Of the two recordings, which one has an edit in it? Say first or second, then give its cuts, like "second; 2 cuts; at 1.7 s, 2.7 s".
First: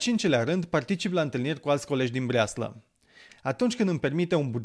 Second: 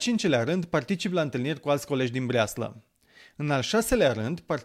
first; 1 cut; at 3.3 s